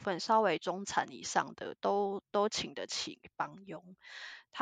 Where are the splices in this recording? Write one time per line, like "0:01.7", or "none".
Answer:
none